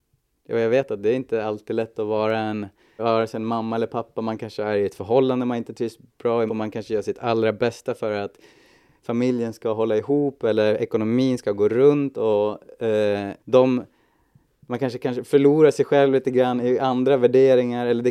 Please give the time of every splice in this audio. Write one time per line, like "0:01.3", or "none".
0:03.0
0:06.5
0:13.4